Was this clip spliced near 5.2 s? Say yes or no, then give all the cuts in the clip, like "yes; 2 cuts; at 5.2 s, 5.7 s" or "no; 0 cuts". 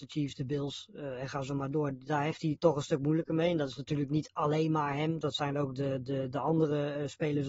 yes; 1 cut; at 5.2 s